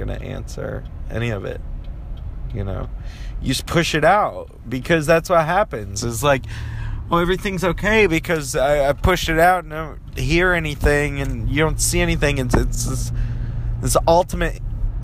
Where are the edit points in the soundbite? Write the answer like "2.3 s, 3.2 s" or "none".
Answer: none